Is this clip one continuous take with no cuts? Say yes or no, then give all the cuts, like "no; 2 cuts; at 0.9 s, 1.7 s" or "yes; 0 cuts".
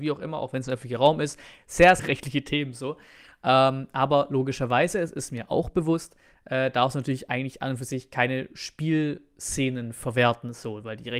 no; 1 cut; at 2.0 s